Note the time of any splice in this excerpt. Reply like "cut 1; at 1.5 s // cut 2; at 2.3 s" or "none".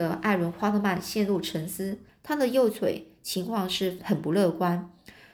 cut 1; at 2.1 s // cut 2; at 4.0 s